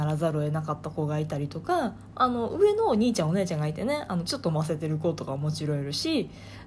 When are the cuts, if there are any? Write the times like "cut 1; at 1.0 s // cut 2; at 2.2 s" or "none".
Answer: cut 1; at 2.1 s